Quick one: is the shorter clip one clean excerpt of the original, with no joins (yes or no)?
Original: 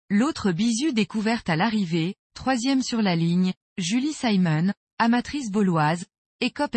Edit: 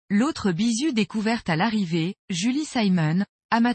no